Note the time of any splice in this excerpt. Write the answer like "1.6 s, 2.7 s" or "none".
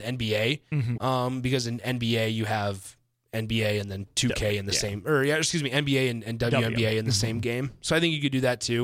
0.9 s